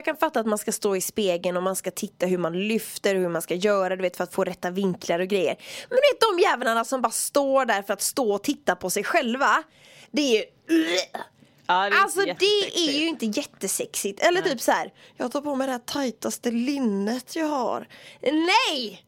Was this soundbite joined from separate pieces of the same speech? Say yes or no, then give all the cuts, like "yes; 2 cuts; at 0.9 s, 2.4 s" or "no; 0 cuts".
no; 0 cuts